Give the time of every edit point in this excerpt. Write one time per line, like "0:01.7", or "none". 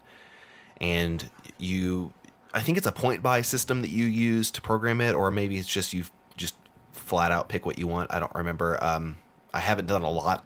none